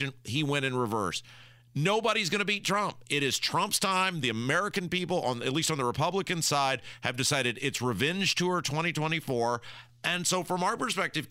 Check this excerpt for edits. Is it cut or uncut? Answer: uncut